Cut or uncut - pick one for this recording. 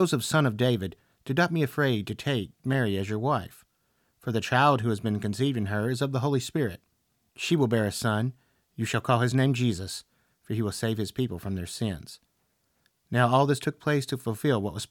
uncut